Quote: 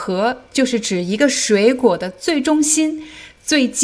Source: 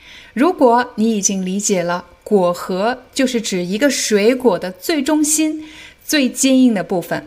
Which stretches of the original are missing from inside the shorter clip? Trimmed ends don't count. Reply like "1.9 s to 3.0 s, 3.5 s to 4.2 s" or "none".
none